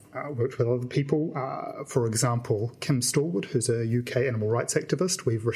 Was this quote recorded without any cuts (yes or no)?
yes